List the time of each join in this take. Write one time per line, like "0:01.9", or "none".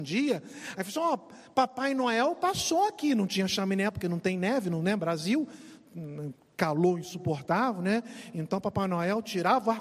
none